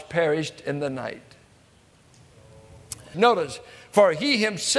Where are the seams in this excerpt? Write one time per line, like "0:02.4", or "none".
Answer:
0:03.1